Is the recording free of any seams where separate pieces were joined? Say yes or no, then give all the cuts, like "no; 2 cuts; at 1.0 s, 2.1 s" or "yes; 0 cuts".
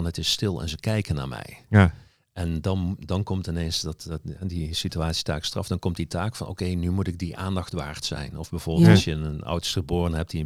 yes; 0 cuts